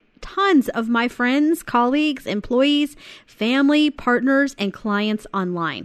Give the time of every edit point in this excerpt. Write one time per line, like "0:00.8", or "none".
none